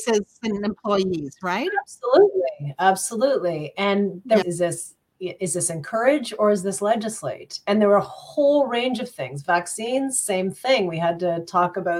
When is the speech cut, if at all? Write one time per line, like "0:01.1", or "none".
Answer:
0:04.4